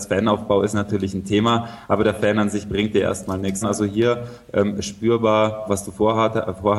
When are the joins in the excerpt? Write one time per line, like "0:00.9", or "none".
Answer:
0:03.6
0:05.7